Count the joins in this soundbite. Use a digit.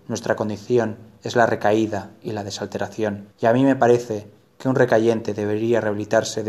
1